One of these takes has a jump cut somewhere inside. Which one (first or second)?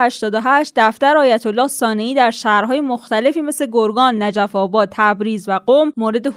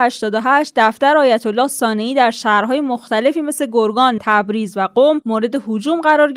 second